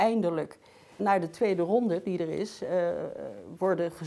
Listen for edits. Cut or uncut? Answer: cut